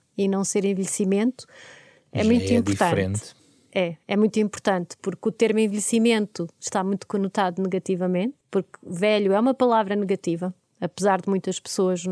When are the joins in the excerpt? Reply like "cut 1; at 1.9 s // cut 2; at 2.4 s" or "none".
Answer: cut 1; at 8.4 s